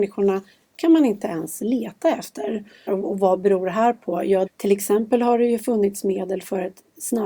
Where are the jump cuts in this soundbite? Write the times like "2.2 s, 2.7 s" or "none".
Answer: 2.9 s, 4.5 s